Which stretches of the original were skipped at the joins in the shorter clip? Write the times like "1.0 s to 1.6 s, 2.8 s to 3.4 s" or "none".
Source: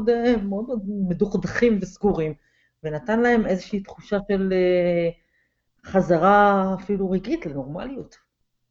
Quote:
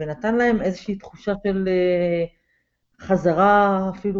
none

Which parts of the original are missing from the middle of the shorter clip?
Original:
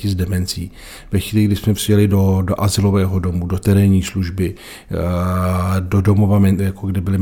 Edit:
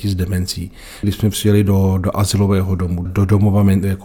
1.0 s to 1.5 s, 3.5 s to 5.8 s

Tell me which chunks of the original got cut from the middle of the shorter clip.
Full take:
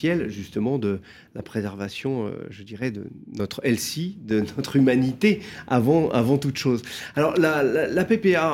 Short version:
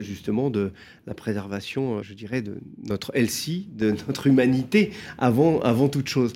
2.3 s to 2.5 s

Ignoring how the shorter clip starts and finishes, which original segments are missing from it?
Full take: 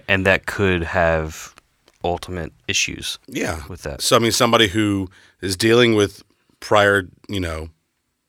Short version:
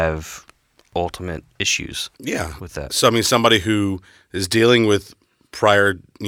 none

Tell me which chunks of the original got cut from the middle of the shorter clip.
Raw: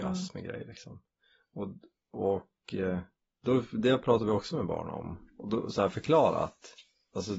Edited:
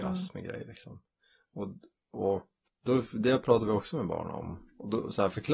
2.7 s to 3.3 s

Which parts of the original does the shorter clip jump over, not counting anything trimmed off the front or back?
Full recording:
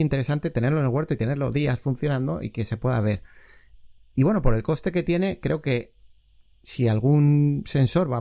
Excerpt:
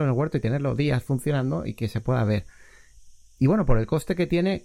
none

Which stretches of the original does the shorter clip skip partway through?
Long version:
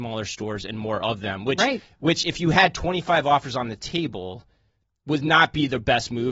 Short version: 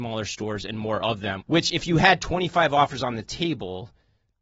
1.4 s to 1.9 s

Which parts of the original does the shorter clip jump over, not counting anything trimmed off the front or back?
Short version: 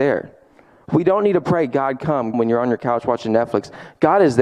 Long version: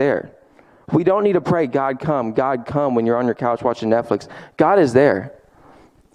2.3 s to 2.9 s

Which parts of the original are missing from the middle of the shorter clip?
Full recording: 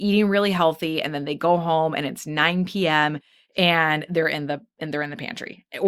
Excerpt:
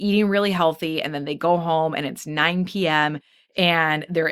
none

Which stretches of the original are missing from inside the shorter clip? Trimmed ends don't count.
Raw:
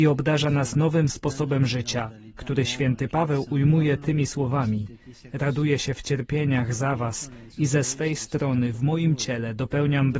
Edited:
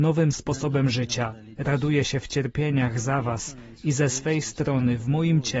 2.3 s to 5.3 s

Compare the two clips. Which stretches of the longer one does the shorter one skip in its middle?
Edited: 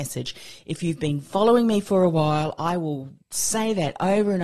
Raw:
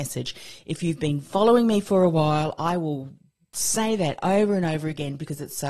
3.2 s to 3.5 s

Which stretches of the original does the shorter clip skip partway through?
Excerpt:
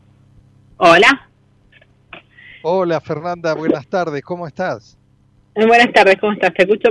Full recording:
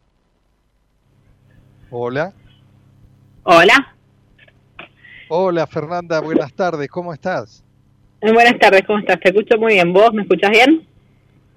none

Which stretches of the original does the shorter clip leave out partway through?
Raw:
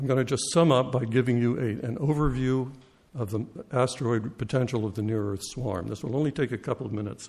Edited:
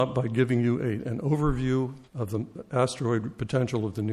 2.8 s to 3.1 s

